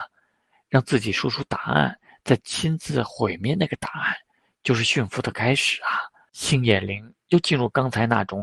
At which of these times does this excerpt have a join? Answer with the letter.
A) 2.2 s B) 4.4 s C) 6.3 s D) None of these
C